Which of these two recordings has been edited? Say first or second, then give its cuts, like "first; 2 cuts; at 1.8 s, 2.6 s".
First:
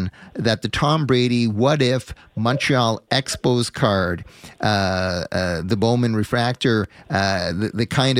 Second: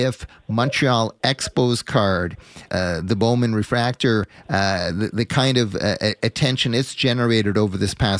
second; 1 cut; at 2.7 s